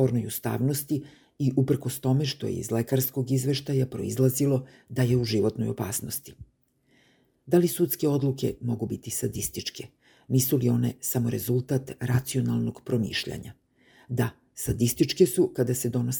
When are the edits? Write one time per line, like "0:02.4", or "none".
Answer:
none

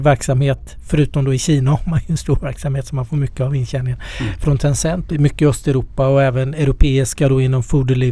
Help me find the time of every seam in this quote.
0:05.1

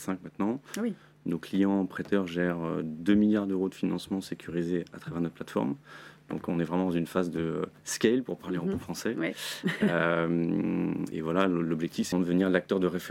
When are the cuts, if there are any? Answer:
0:11.1
0:12.1

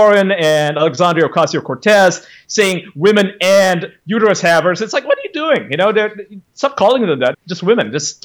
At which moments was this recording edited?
0:07.3

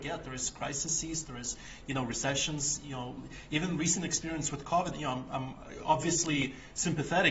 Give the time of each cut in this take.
0:04.9

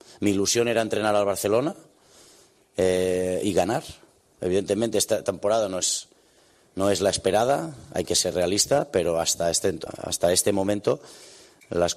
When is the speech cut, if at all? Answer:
0:04.4
0:09.9

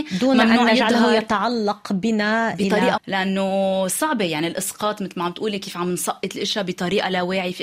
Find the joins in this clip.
0:03.0

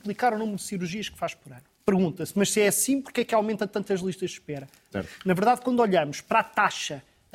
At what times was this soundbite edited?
0:01.7
0:04.9

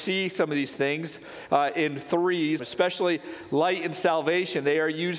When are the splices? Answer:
0:02.6

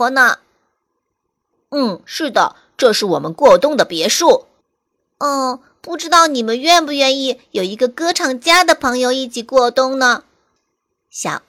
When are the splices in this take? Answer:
0:04.6

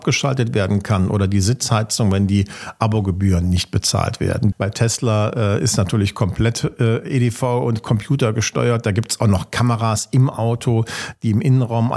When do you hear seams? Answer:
0:04.5

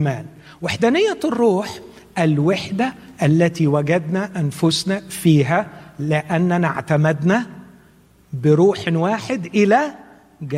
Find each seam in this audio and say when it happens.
none

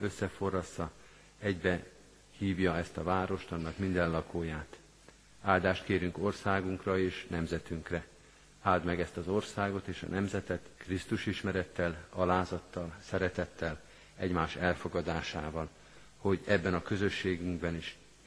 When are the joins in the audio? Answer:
0:10.7

